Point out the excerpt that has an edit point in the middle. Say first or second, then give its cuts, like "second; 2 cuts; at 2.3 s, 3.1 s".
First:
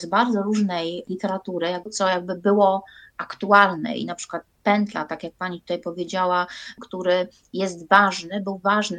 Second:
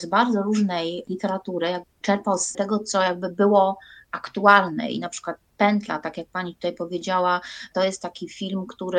first; 2 cuts; at 1.9 s, 6.8 s